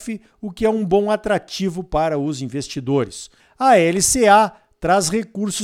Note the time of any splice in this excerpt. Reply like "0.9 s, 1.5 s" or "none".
3.4 s